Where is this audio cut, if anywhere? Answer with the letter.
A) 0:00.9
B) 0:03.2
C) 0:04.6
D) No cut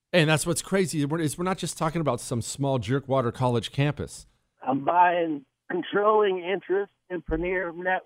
C